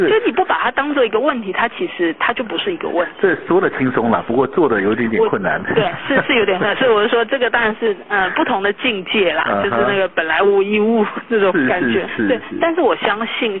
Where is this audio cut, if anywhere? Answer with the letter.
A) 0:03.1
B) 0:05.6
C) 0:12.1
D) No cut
C